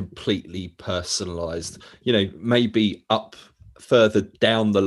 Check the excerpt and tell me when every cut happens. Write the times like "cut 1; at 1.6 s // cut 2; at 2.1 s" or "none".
none

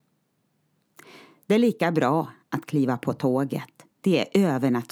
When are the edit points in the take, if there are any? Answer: cut 1; at 3.9 s

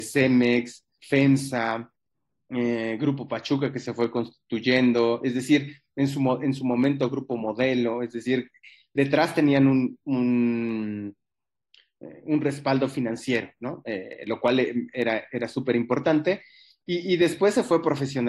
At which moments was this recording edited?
none

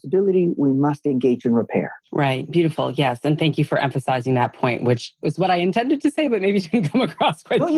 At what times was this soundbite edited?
cut 1; at 2.0 s

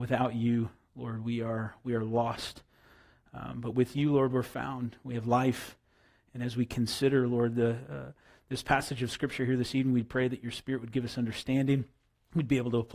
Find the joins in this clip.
none

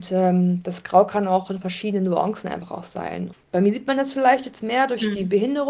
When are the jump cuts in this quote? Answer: cut 1; at 3.3 s

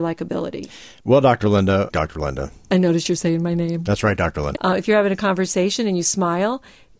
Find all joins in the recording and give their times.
cut 1; at 1.9 s // cut 2; at 4.5 s

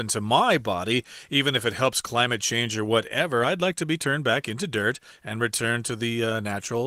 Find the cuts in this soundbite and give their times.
none

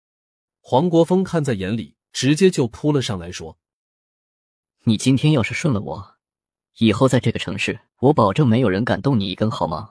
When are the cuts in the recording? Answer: cut 1; at 2.0 s // cut 2; at 7.9 s

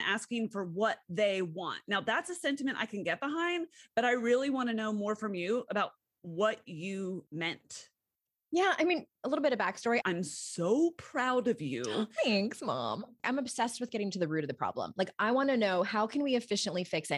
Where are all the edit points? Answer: cut 1; at 10.0 s // cut 2; at 13.2 s

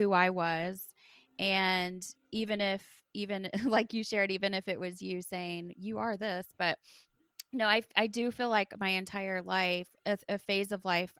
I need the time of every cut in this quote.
cut 1; at 10.0 s

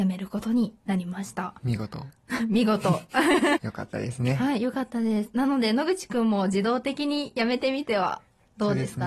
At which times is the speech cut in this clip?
cut 1; at 3.6 s

